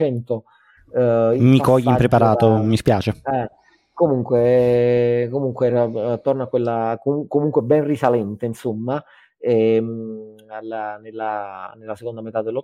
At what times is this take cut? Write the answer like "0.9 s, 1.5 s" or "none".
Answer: none